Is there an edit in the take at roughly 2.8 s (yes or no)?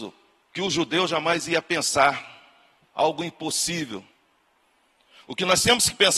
yes